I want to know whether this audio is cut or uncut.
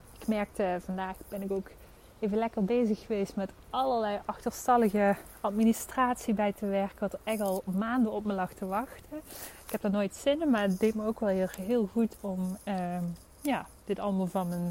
uncut